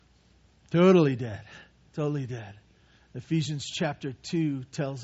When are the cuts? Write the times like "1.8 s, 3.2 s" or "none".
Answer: 3.0 s